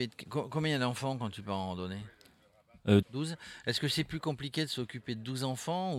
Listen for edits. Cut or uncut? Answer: cut